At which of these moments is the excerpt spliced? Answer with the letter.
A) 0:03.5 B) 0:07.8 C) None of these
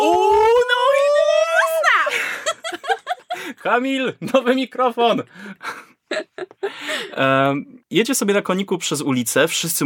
B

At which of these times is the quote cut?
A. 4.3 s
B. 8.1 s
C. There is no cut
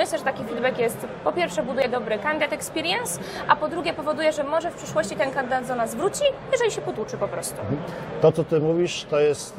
C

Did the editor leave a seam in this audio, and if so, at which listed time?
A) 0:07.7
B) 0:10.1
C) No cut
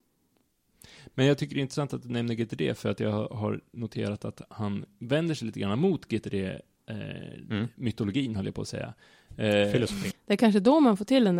B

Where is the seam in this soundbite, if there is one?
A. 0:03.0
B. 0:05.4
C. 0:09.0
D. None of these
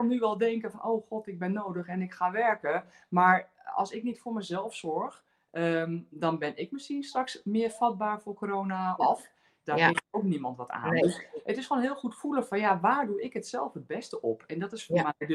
C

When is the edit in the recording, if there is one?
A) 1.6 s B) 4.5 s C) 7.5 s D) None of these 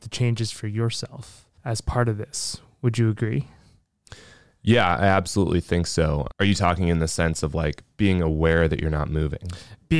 A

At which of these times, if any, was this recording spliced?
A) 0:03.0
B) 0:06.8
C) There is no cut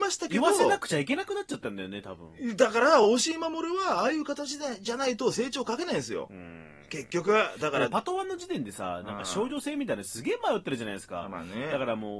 C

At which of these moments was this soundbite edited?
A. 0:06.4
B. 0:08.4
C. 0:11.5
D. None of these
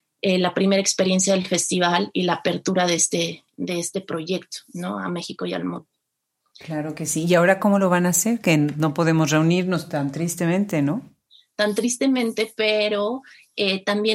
D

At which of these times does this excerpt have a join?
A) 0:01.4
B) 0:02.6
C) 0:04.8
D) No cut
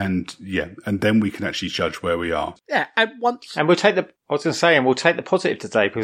B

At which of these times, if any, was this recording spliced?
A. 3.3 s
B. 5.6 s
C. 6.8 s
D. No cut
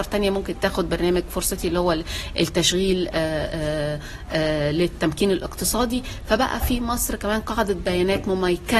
D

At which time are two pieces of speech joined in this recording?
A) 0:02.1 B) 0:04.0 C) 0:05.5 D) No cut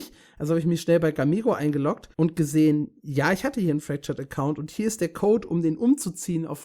A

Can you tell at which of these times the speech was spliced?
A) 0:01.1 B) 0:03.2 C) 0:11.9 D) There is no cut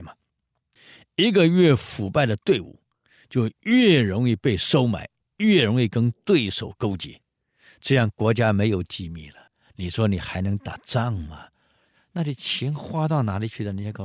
C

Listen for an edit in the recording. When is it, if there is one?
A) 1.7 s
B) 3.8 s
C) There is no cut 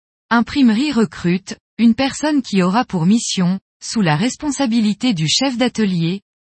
A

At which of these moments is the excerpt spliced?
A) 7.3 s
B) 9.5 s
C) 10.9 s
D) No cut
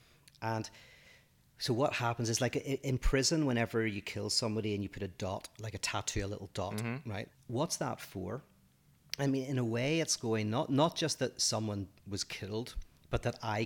A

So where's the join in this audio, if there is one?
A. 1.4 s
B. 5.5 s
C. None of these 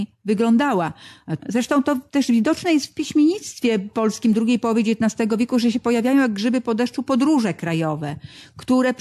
A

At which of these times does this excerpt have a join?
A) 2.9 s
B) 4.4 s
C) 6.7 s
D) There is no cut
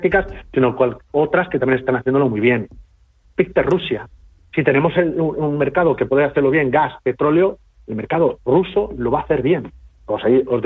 D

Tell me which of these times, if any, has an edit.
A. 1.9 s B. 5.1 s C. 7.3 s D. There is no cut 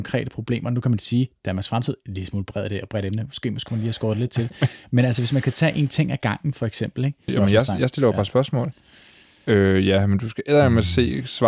C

